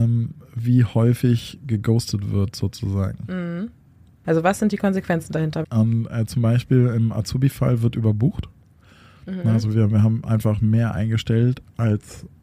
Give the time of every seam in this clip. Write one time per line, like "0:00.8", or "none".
0:04.2
0:05.6